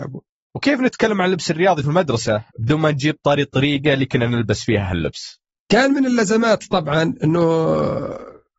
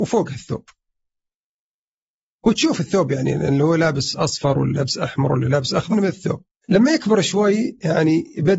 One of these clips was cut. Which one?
second; 1 cut; at 5.9 s

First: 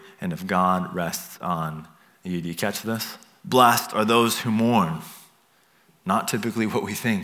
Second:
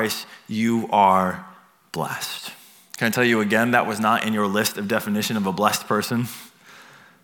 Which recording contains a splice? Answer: first; 1 cut; at 3.4 s

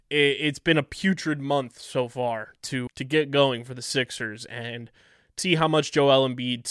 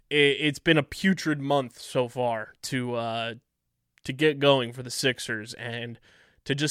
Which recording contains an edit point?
first; 2 cuts; at 2.9 s, 5.4 s

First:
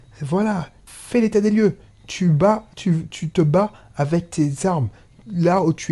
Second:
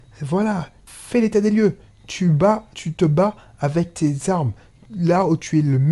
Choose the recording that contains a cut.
second; 1 cut; at 2.7 s

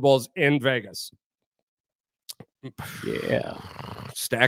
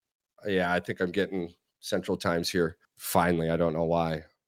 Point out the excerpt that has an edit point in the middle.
second; 1 cut; at 2.8 s

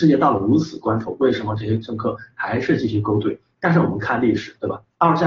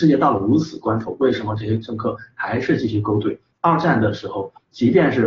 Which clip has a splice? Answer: second; 1 cut; at 3.5 s

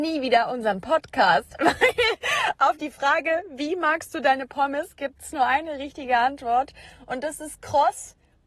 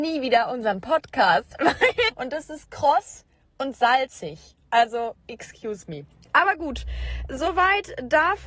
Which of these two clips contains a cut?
second; 2 cuts; at 2.1 s, 7.3 s

